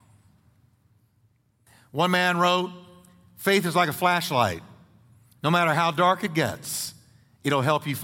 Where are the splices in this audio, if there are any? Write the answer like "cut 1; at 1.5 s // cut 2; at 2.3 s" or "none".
none